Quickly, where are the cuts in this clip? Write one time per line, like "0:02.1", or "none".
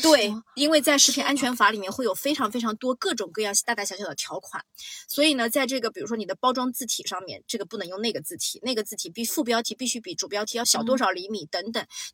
0:10.6